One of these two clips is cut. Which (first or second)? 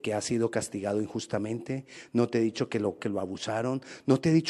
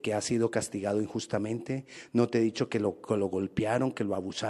first